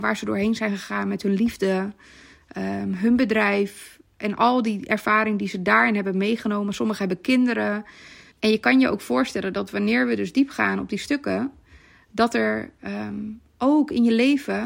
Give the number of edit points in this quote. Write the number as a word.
one